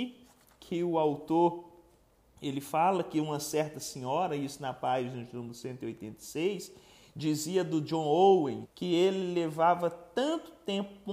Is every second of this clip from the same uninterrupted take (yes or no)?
no